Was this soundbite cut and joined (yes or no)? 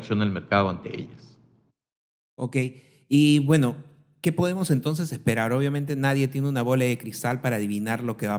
no